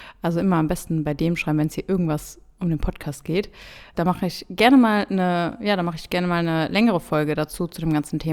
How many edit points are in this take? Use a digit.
1